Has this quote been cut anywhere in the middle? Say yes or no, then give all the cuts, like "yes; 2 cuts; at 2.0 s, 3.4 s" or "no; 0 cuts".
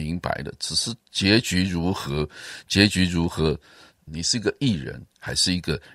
yes; 1 cut; at 4.1 s